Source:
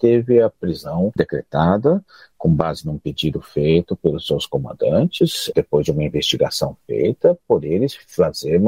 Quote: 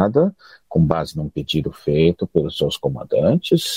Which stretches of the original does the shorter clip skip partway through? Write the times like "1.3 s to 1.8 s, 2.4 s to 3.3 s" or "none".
none